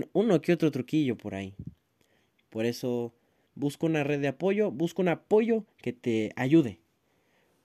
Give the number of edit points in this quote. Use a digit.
1